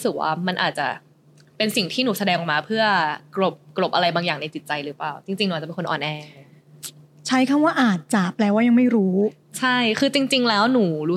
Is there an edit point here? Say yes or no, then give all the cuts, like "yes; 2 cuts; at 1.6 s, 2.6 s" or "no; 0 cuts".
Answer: no; 0 cuts